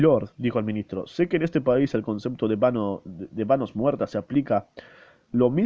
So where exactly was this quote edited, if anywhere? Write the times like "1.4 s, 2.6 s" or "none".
none